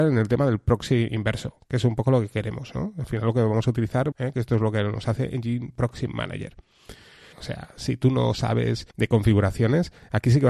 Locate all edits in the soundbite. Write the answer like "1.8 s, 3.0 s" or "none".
4.1 s, 7.3 s, 8.9 s